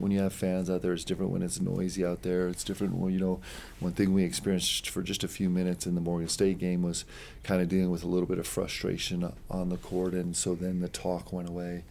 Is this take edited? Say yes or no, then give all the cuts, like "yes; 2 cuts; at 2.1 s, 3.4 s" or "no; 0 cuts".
no; 0 cuts